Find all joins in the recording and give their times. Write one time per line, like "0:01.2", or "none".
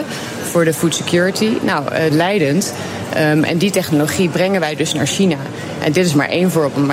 0:02.1